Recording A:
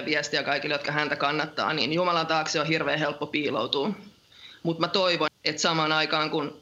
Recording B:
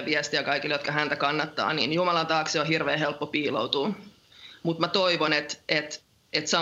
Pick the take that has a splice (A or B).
A